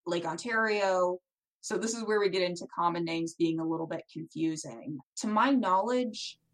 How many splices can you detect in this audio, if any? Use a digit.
2